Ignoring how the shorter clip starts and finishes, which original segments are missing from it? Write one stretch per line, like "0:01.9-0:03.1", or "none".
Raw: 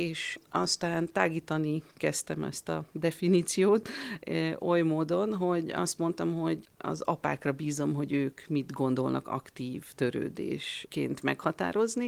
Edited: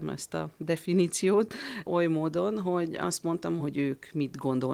0:04.2-0:04.6
0:06.3-0:07.9